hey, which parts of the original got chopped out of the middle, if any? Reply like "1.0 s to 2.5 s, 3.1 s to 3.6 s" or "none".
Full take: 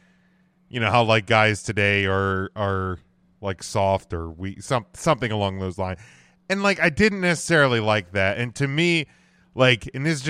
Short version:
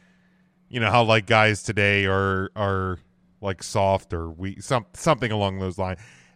none